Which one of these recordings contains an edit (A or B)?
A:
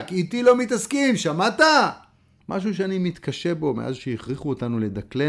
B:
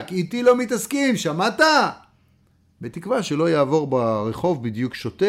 A